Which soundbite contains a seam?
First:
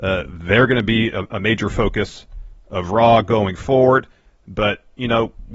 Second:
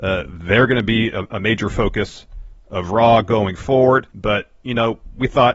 second; 1 cut; at 4.1 s

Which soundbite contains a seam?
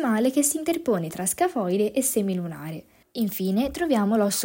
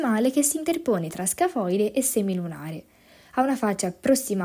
first; 1 cut; at 3.0 s

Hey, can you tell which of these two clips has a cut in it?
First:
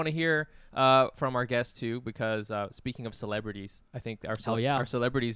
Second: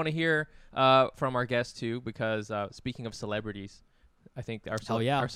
first; 1 cut; at 3.9 s

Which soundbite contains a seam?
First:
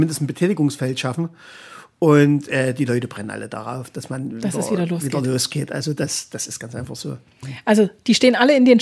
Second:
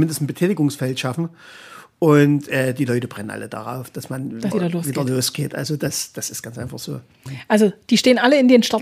second; 1 cut; at 4.5 s

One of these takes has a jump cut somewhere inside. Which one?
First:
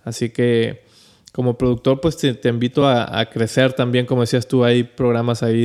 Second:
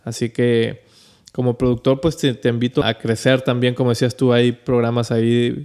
second; 1 cut; at 2.8 s

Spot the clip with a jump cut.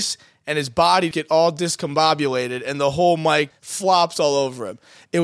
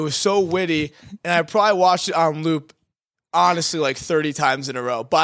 first; 2 cuts; at 1.1 s, 3.5 s

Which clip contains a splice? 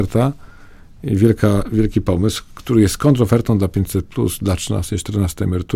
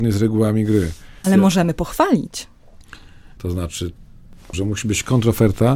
second; 3 cuts; at 1.2 s, 3.4 s, 4.5 s

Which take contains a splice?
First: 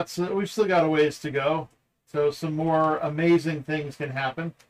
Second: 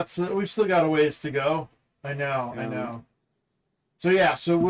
second; 1 cut; at 2.0 s

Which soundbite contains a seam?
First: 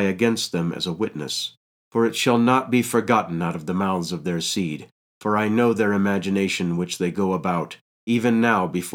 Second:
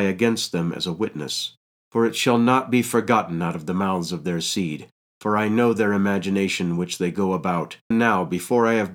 second; 1 cut; at 7.9 s

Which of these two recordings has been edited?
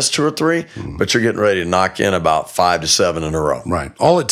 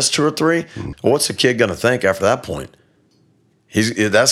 second; 1 cut; at 0.9 s

